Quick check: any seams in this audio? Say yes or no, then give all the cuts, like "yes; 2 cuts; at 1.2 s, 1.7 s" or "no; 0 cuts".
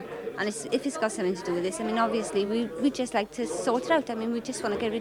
no; 0 cuts